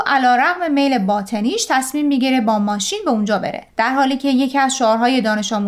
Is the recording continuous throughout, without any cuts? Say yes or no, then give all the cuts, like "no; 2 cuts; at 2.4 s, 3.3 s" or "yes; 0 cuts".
no; 1 cut; at 3.7 s